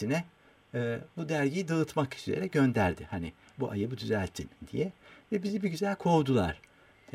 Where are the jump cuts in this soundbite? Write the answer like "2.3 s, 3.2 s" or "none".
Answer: none